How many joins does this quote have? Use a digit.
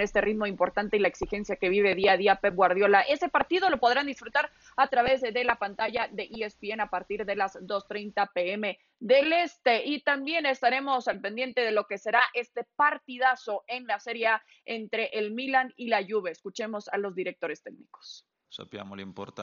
1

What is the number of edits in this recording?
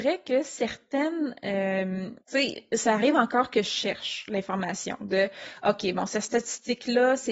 1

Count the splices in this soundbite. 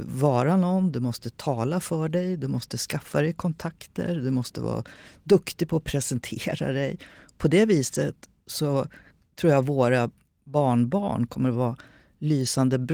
0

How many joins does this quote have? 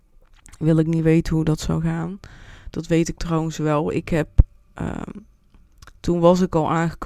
0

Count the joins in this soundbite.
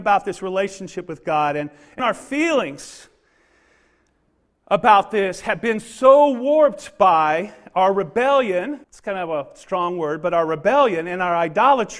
2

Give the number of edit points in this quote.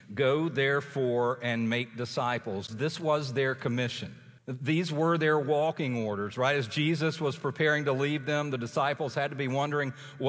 2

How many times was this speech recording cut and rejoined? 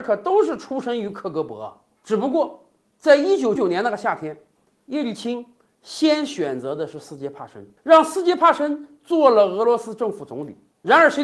2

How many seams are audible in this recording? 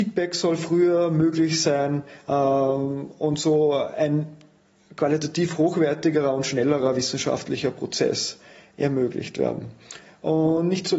0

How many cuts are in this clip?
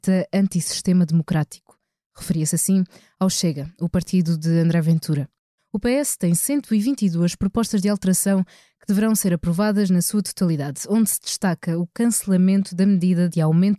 1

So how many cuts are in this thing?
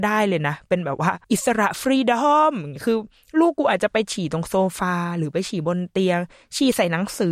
1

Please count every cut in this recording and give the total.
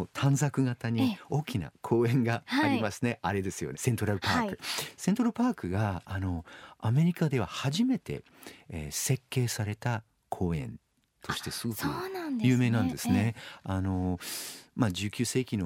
1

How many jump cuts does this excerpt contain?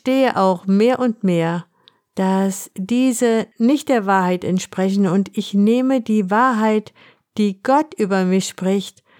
0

